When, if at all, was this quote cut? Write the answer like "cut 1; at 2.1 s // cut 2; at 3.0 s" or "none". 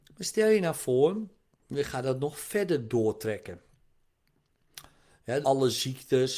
cut 1; at 5.4 s